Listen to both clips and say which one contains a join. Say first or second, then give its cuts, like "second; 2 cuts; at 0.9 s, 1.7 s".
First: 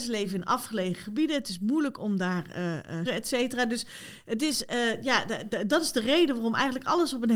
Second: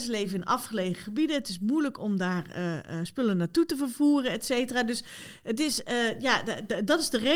first; 1 cut; at 3.1 s